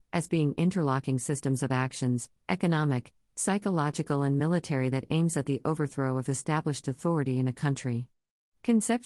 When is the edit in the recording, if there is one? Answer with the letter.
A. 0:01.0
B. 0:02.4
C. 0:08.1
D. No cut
B